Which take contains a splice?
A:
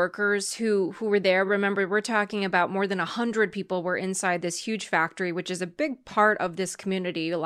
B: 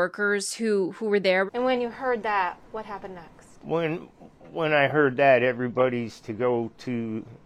B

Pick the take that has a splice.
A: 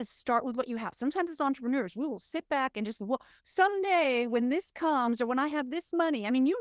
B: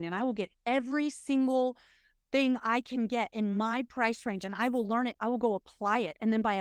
B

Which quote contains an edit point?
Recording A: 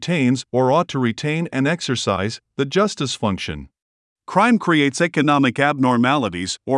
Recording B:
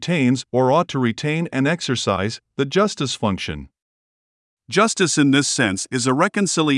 A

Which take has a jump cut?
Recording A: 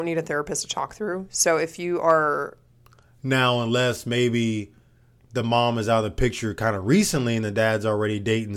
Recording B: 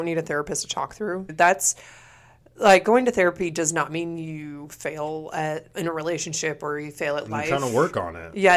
B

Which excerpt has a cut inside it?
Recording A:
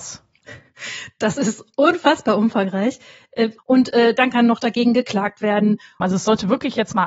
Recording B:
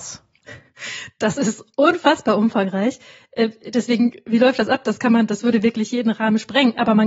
A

